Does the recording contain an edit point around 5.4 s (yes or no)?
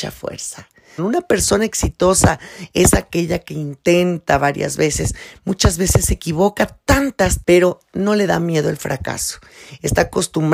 no